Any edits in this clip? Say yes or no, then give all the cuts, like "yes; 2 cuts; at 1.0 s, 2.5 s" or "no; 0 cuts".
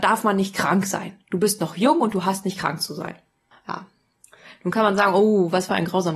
yes; 1 cut; at 3.5 s